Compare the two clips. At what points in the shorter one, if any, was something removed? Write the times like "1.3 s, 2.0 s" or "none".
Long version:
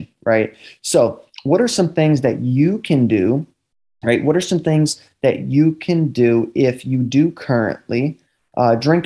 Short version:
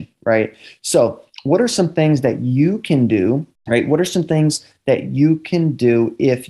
3.5 s

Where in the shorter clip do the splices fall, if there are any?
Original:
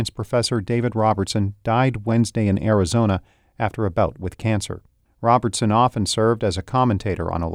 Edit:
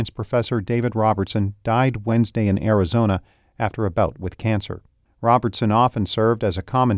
none

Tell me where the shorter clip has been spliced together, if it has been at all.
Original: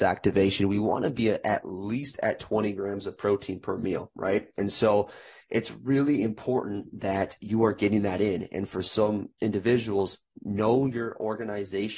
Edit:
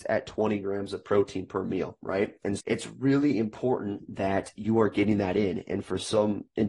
2.6 s

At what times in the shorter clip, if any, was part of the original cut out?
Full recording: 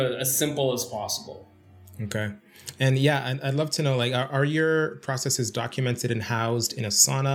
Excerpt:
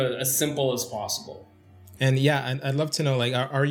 2.0 s

